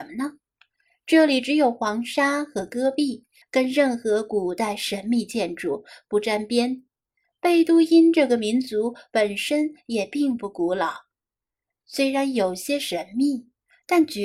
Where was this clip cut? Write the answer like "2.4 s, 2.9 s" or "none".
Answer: 3.4 s